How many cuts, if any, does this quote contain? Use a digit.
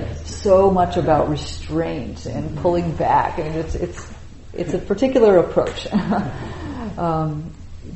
0